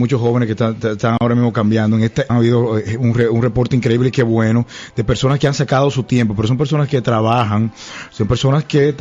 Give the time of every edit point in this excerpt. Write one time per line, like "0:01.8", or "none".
0:02.3